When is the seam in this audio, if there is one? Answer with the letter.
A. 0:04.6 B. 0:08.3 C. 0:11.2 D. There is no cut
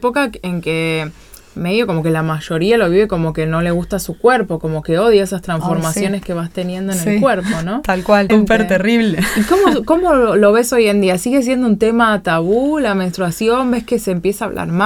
B